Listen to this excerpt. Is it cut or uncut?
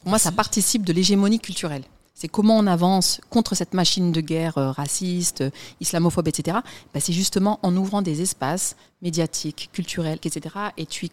cut